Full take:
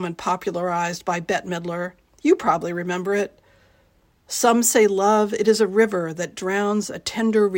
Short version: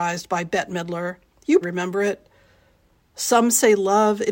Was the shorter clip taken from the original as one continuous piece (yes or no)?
no